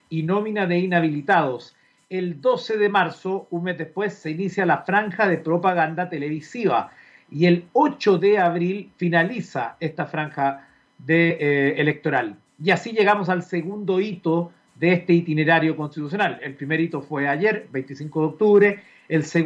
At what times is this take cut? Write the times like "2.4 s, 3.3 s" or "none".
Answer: none